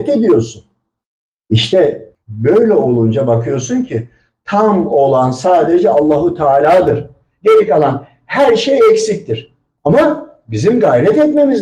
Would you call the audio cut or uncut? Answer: uncut